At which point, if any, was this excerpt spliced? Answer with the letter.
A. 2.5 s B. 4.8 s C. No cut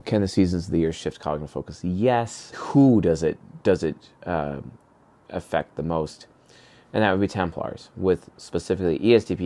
A